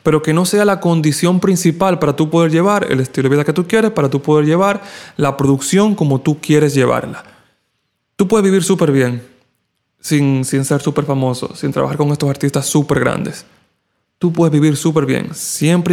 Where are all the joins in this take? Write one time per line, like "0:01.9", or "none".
none